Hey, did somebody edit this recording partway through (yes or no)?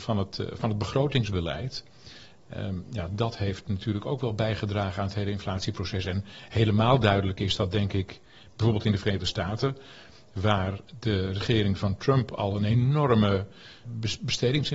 no